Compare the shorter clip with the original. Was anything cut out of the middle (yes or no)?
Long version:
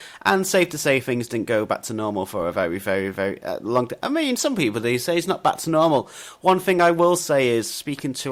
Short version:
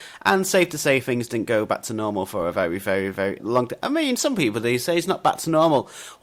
yes